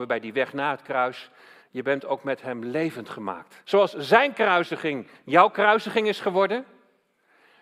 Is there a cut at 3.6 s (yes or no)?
yes